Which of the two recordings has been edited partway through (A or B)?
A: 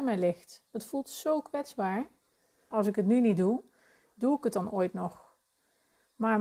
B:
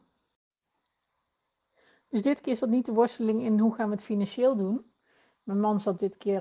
A